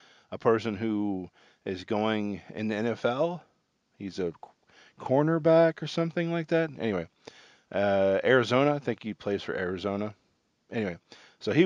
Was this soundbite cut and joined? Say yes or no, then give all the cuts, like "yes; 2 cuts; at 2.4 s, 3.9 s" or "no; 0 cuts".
no; 0 cuts